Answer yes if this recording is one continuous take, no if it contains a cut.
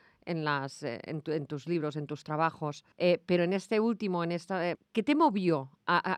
no